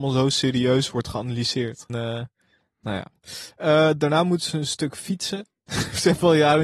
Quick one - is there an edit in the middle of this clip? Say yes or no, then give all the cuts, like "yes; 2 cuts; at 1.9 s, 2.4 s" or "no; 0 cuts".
yes; 1 cut; at 1.9 s